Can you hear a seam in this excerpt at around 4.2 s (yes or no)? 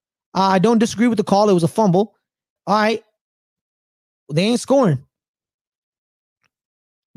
no